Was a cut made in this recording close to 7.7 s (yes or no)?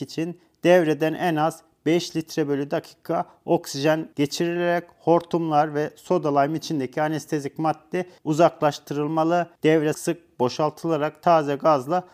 no